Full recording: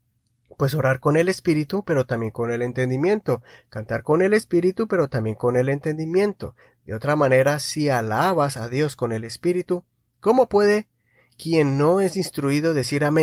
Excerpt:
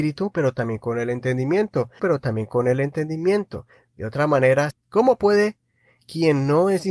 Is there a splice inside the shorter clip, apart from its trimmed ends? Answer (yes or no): yes